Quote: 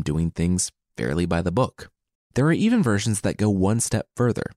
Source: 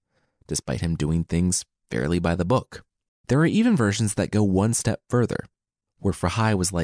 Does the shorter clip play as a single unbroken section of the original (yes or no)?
yes